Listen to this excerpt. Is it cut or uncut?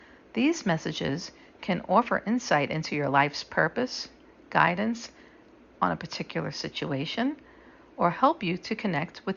uncut